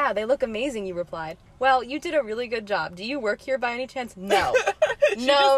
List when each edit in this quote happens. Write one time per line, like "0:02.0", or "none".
0:01.5